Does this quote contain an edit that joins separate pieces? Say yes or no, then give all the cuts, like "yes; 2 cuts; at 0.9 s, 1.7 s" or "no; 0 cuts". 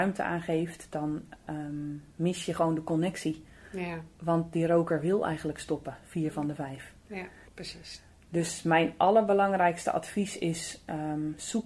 yes; 1 cut; at 7.5 s